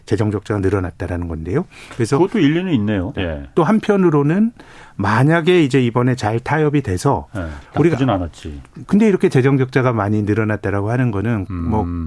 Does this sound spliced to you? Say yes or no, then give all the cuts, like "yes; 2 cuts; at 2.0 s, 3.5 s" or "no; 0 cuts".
yes; 3 cuts; at 3.1 s, 7.6 s, 8.8 s